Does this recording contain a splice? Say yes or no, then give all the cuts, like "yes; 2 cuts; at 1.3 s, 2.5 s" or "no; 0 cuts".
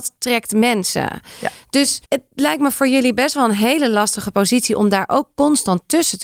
yes; 1 cut; at 2.0 s